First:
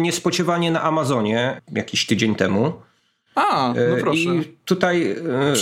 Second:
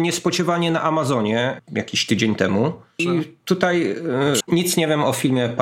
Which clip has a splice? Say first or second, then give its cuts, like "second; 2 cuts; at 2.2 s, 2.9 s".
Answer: second; 2 cuts; at 3.0 s, 4.4 s